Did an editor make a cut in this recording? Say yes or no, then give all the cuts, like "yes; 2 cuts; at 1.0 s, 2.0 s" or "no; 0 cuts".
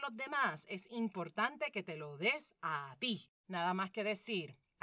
yes; 1 cut; at 3.4 s